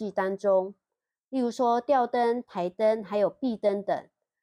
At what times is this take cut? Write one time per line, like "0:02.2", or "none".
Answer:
none